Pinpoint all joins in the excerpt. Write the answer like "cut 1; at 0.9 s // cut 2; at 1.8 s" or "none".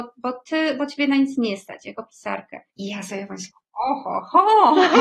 cut 1; at 2.7 s

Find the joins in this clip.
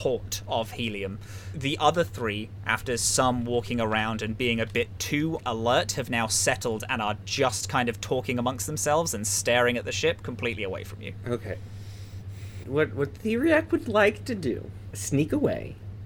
cut 1; at 12.6 s

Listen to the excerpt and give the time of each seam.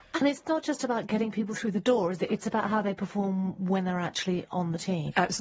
none

